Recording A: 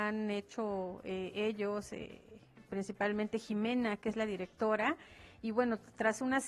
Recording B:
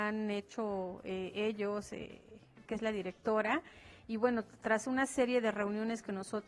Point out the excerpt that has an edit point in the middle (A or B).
B